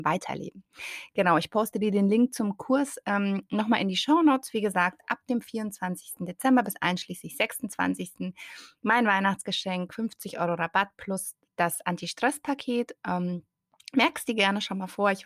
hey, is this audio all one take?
yes; 0 cuts

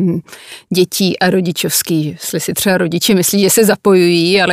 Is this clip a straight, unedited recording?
yes; 0 cuts

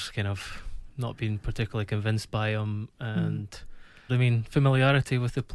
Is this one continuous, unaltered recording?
no; 1 cut; at 4.1 s

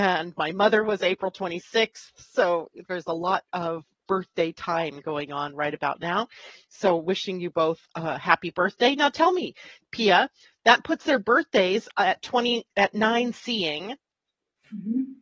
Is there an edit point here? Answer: yes; 1 cut; at 4.0 s

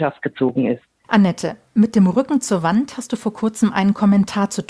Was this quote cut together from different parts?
yes; 1 cut; at 1.0 s

